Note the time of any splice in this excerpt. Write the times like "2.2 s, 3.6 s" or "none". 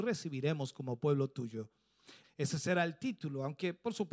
2.2 s